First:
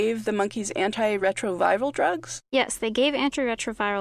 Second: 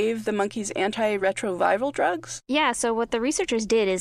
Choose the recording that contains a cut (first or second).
second